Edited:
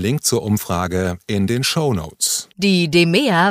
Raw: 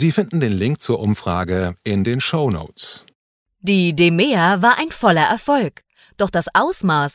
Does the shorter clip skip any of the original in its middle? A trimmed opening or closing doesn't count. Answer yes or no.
yes